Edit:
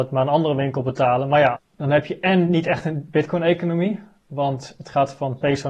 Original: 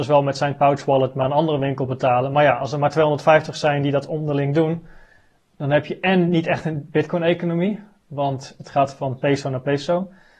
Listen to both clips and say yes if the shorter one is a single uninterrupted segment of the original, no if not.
no